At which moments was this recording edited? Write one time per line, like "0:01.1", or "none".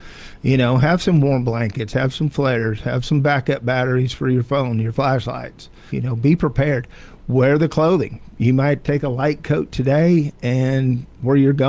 0:05.9

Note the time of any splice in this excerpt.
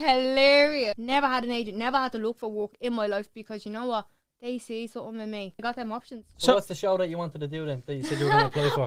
0:00.9
0:05.6

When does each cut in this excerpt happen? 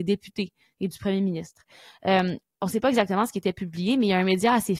none

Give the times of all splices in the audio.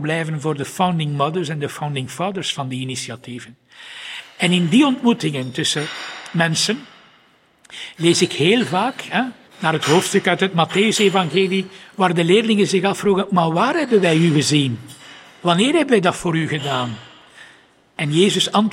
0:09.5

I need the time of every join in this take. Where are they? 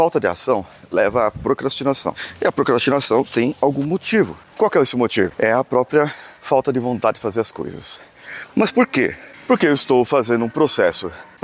none

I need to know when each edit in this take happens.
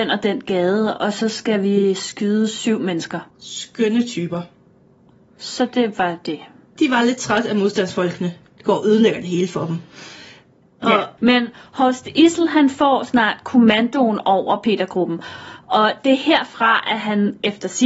0:03.3
0:06.8
0:11.2

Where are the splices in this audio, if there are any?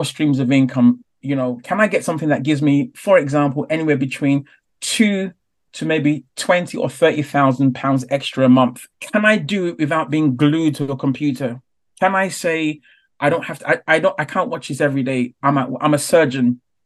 0:08.9

